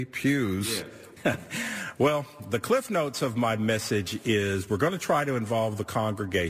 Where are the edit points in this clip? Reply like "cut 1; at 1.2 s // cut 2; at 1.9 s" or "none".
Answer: cut 1; at 1.2 s